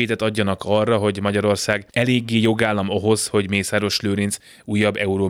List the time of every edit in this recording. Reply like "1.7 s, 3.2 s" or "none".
1.9 s